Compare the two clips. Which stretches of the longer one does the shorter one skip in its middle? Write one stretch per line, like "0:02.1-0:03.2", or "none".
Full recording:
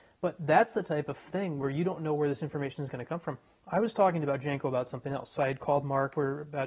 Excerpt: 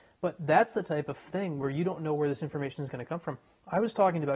none